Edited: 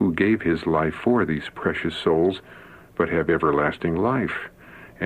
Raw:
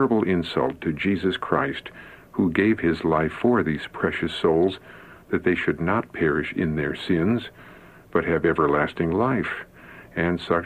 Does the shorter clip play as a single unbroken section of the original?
no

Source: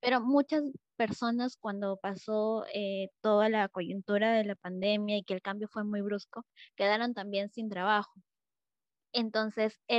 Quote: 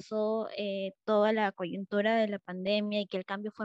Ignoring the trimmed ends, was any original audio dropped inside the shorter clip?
no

